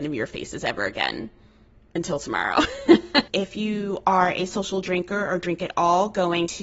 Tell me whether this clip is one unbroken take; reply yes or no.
no